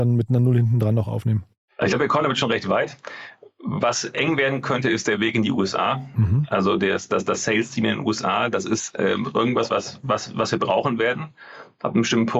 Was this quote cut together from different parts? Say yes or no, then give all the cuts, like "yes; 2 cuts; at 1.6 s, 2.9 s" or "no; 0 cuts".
yes; 1 cut; at 9.7 s